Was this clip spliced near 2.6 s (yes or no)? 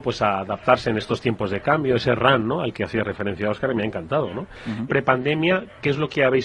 no